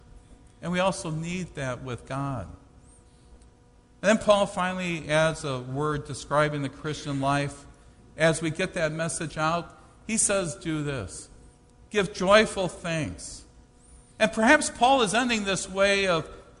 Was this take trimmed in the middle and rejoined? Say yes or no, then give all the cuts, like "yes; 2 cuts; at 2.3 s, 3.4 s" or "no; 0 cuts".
no; 0 cuts